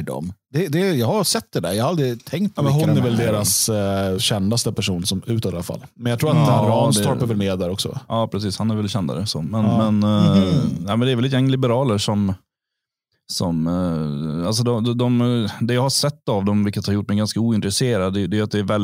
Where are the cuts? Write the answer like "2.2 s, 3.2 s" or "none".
4.2 s